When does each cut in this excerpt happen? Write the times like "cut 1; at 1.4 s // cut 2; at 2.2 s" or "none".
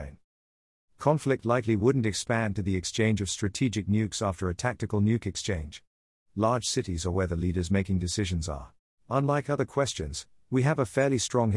cut 1; at 8.9 s